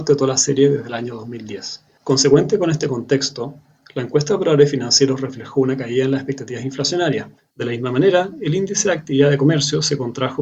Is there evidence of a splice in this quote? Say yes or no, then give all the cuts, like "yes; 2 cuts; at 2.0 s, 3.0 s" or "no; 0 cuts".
yes; 2 cuts; at 2.0 s, 7.5 s